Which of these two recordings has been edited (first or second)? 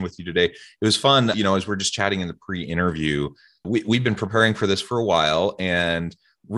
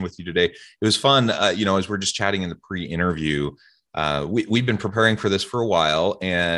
first